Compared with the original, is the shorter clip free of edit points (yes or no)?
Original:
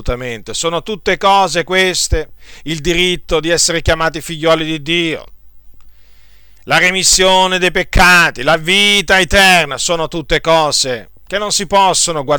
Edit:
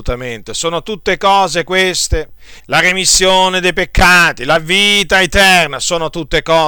no